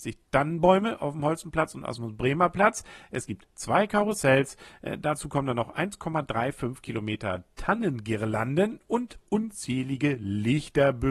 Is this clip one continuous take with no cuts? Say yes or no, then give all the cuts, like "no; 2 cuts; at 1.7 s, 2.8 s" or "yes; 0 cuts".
yes; 0 cuts